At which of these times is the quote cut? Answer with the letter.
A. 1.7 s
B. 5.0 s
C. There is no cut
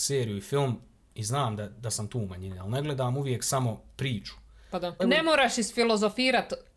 B